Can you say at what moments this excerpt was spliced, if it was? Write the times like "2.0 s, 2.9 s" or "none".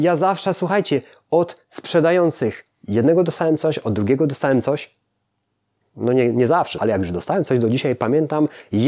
6.8 s